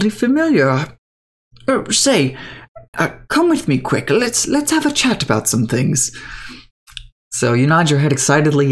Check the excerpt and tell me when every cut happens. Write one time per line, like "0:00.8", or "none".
0:02.9

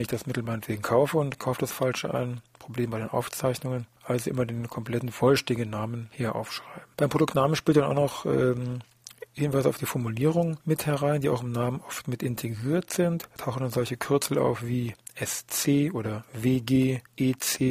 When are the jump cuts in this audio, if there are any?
none

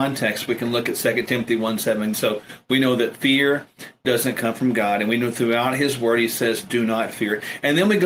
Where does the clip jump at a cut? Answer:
0:02.1

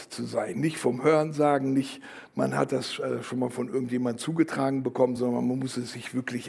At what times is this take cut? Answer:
none

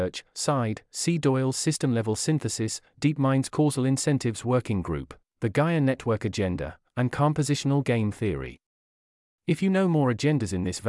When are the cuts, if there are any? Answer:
none

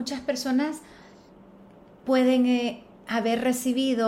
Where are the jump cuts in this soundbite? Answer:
none

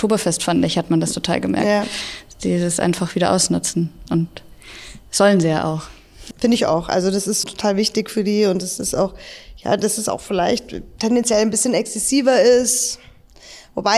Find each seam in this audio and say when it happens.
0:06.3
0:07.4

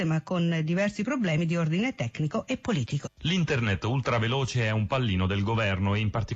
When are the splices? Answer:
0:03.0

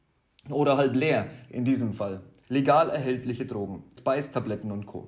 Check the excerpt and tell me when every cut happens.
0:02.4
0:04.0

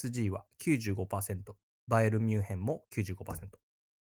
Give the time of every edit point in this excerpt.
none

